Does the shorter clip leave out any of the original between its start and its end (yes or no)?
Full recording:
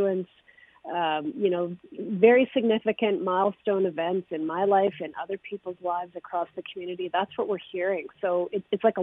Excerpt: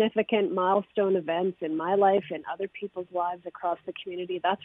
no